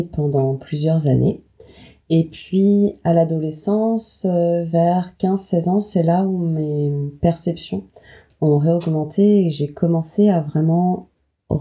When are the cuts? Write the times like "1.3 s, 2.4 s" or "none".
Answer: none